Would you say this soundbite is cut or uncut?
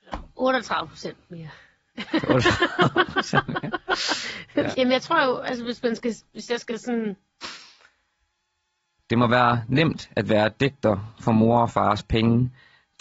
cut